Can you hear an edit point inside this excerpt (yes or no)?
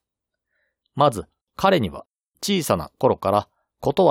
yes